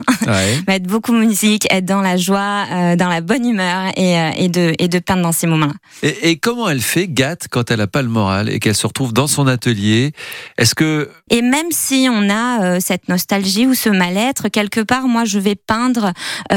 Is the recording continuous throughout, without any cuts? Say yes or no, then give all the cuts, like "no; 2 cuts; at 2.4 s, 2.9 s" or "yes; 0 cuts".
no; 1 cut; at 11.3 s